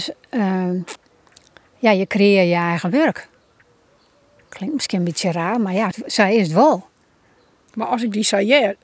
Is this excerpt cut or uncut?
cut